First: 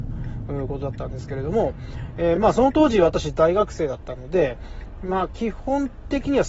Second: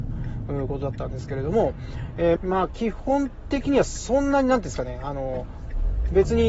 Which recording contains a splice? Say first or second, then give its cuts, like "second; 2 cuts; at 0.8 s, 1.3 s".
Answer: second; 1 cut; at 2.4 s